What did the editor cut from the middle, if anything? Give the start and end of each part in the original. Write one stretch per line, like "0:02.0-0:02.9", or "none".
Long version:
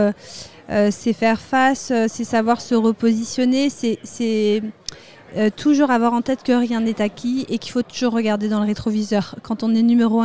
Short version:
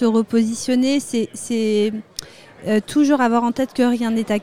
none